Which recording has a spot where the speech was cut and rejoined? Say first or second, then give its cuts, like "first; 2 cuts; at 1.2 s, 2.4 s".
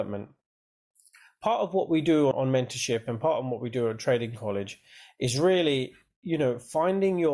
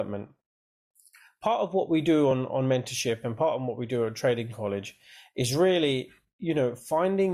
first; 1 cut; at 2.3 s